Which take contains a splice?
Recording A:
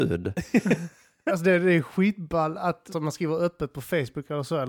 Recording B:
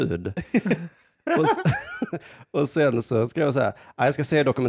A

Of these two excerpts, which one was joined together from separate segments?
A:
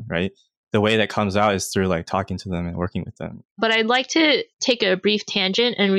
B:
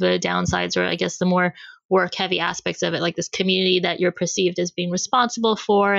A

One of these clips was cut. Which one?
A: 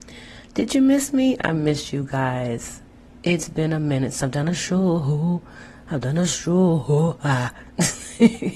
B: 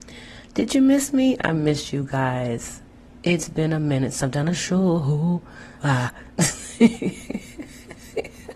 B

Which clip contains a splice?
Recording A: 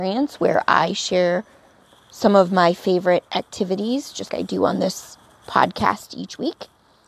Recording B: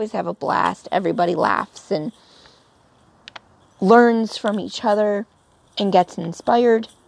A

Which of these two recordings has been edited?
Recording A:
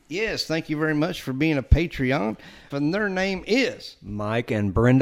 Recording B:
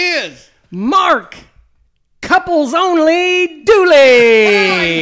A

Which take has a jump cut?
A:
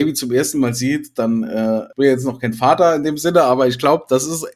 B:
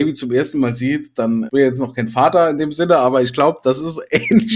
B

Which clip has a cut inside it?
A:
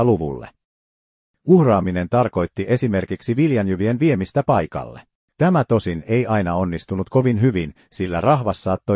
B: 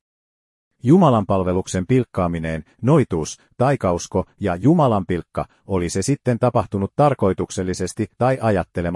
A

